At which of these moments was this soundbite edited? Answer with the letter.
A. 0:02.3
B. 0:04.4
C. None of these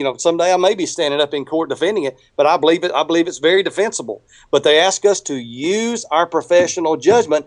C